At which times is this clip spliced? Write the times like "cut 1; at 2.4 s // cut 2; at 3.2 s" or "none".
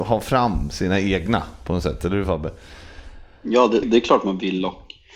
cut 1; at 3.8 s